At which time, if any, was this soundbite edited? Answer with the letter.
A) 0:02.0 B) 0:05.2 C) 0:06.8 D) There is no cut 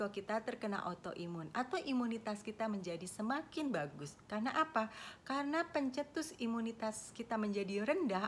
D